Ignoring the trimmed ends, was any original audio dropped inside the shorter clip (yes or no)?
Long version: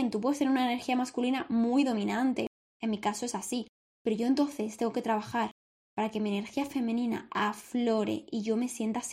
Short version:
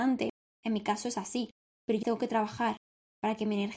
yes